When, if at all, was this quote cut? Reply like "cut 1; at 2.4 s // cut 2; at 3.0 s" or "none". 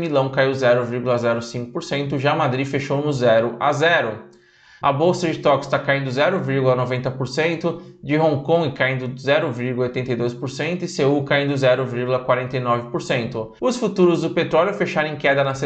cut 1; at 4.8 s // cut 2; at 13.6 s